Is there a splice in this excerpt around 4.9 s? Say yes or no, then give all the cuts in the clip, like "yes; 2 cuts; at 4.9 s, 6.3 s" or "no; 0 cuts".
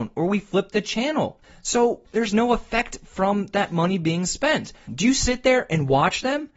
yes; 2 cuts; at 2.0 s, 4.9 s